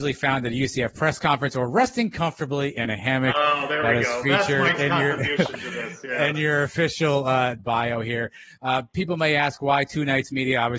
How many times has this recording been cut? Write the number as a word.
one